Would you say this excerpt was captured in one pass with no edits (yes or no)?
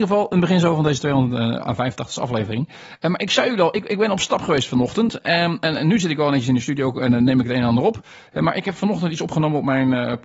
yes